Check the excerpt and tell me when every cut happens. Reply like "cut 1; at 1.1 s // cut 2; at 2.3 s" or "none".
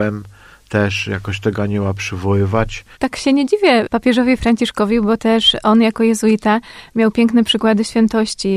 cut 1; at 2.9 s